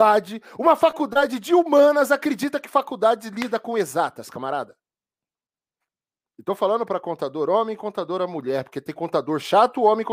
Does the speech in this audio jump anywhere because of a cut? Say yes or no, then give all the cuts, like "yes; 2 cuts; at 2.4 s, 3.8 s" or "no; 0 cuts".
no; 0 cuts